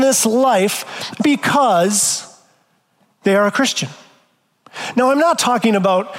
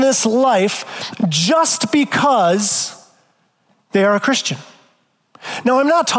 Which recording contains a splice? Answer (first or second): first